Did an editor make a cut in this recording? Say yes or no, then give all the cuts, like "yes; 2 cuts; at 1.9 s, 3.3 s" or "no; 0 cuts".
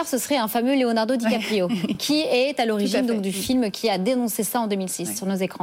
no; 0 cuts